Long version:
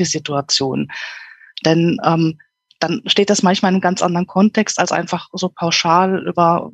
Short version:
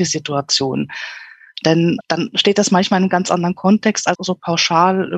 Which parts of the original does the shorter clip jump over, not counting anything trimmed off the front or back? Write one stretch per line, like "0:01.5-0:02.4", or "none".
0:02.0-0:02.7
0:04.9-0:05.3